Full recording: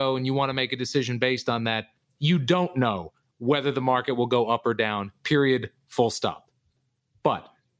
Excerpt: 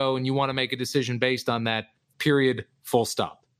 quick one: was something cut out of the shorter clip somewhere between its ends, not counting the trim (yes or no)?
yes